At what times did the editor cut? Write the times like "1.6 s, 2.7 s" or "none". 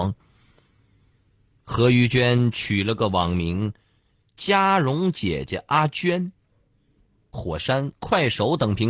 7.3 s